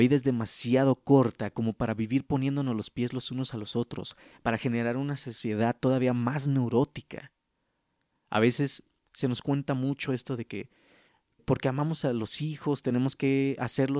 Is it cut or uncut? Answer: cut